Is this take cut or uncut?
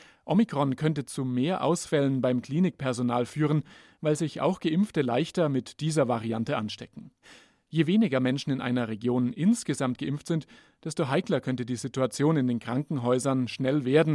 uncut